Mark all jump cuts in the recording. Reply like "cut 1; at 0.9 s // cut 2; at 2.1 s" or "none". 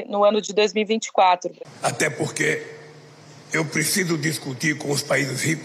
cut 1; at 1.6 s

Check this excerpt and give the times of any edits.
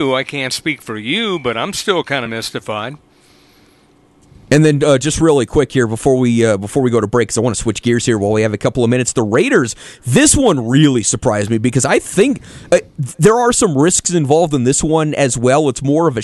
none

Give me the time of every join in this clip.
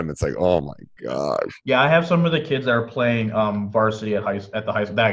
cut 1; at 1.6 s

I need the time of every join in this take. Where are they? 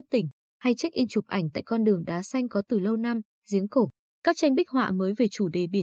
none

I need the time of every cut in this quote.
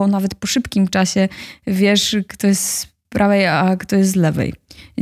none

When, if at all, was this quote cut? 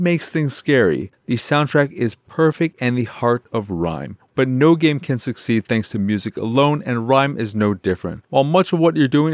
cut 1; at 4.3 s

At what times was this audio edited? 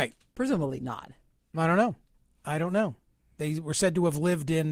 none

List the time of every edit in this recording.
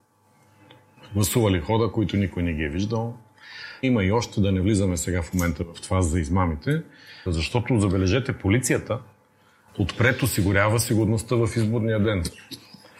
cut 1; at 3.8 s // cut 2; at 7.3 s

